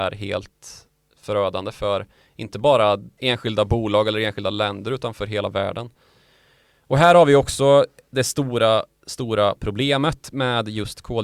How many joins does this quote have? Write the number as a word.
zero